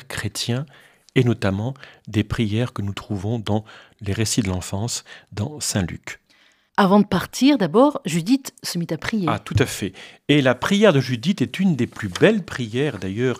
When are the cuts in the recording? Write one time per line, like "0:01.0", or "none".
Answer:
none